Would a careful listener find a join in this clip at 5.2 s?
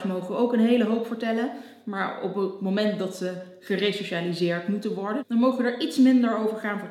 yes; 1 cut; at 5.2 s

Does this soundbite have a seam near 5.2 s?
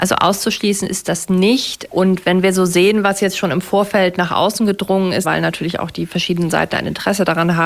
yes; 2 cuts; at 1.9 s, 5.2 s

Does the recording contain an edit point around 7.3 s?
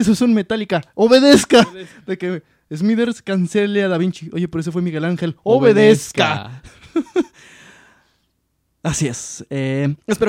no; 0 cuts

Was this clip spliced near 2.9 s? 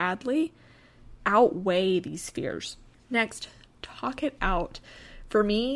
no; 0 cuts

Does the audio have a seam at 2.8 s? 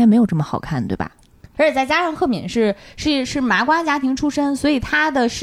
no; 1 cut; at 1.5 s

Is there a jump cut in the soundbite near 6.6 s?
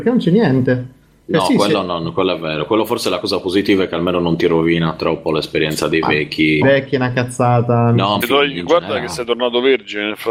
yes; 2 cuts; at 6.6 s, 8.2 s

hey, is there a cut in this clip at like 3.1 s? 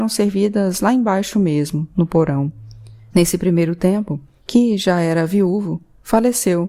yes; 2 cuts; at 3.1 s, 4.4 s

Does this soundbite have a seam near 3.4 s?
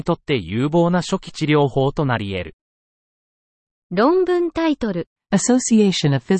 no; 1 cut; at 5.2 s

